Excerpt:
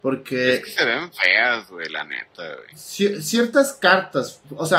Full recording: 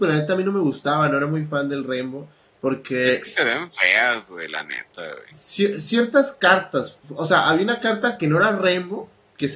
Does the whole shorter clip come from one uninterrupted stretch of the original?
yes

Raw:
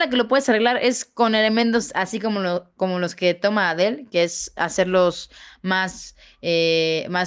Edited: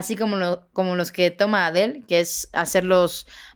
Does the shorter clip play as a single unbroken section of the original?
yes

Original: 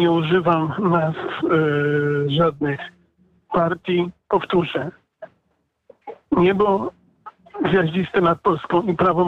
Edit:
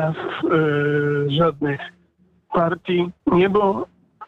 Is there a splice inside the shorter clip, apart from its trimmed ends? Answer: yes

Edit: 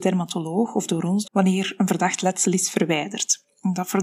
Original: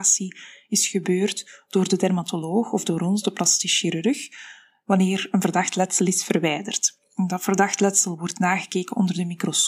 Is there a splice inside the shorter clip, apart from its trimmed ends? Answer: yes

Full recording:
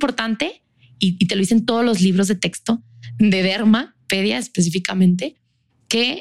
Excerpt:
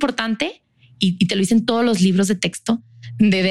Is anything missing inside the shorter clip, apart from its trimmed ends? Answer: no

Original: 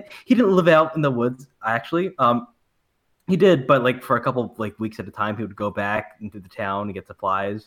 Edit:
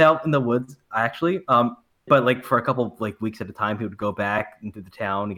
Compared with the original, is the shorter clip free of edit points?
no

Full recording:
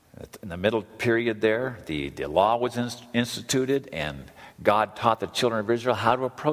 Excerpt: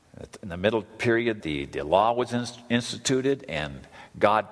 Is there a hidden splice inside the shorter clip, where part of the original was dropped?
yes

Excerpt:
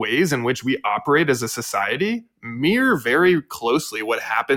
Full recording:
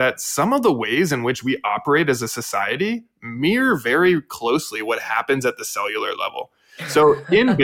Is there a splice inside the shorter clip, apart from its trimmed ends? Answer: no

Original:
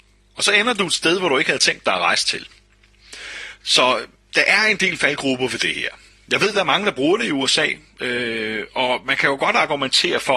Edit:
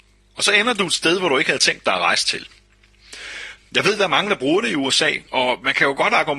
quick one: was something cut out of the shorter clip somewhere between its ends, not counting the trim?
yes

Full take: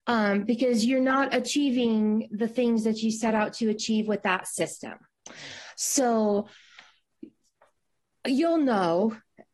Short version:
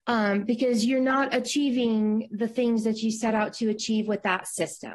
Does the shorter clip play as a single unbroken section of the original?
yes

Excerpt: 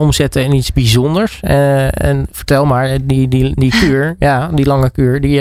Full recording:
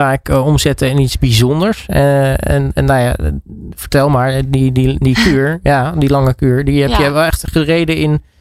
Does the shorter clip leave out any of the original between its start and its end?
yes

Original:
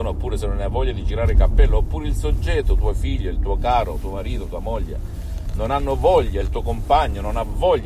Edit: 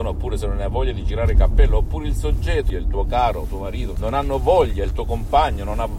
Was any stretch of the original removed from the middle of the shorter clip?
yes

